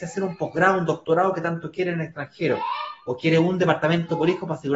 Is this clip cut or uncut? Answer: uncut